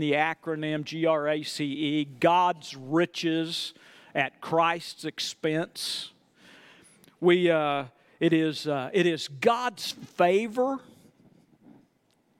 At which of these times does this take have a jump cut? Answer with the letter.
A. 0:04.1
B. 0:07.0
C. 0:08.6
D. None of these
D